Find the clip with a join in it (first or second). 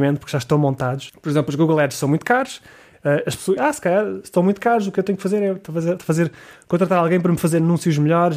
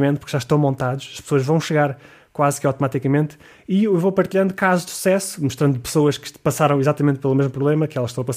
first